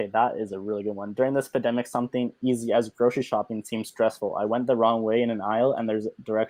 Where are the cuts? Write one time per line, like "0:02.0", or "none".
none